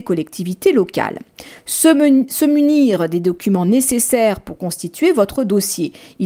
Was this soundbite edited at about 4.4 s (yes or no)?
no